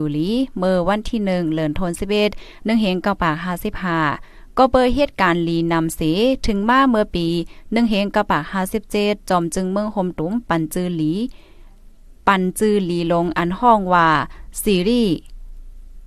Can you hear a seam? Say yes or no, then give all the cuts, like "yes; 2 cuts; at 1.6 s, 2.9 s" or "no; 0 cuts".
no; 0 cuts